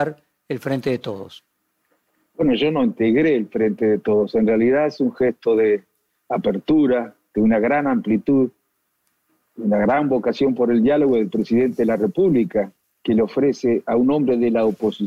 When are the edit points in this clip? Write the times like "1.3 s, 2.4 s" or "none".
none